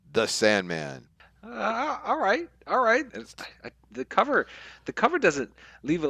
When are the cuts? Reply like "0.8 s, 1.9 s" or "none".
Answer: 3.1 s